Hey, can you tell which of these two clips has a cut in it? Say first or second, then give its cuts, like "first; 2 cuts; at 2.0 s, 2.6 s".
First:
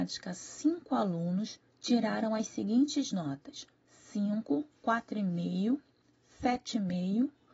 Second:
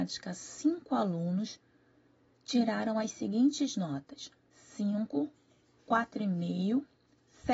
first; 2 cuts; at 1.7 s, 4.8 s